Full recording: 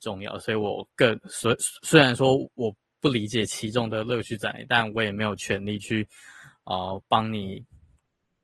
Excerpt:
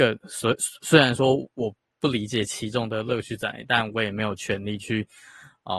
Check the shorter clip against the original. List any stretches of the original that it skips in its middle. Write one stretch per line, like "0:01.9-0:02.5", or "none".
none